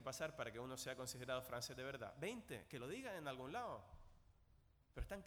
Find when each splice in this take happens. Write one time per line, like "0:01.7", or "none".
none